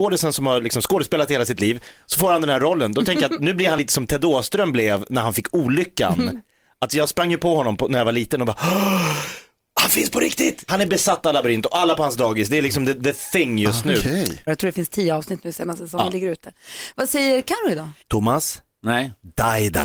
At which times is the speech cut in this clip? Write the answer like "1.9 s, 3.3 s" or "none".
10.7 s, 14.5 s, 18.0 s